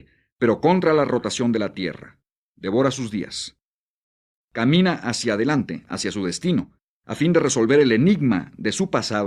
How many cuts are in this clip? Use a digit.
1